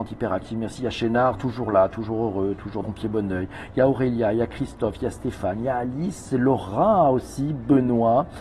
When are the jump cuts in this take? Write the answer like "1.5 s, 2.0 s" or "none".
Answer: 2.8 s